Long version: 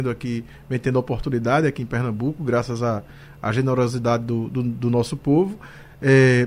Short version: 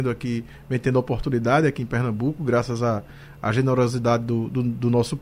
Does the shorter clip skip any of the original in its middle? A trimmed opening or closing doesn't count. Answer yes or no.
no